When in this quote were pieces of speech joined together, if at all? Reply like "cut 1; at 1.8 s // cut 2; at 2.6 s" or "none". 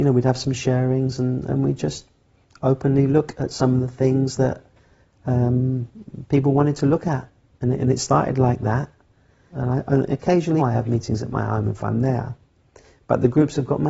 cut 1; at 9.5 s // cut 2; at 10.6 s